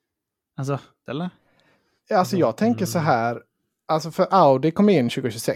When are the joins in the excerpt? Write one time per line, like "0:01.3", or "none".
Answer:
0:01.1